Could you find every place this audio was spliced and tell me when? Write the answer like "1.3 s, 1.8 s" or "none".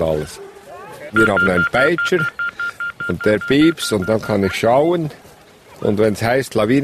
1.1 s